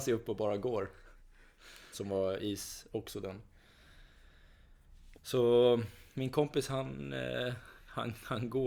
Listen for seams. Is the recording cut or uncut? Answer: cut